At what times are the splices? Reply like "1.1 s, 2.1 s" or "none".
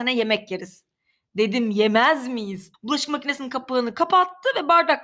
2.7 s